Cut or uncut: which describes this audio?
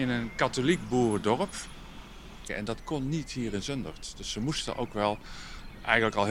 cut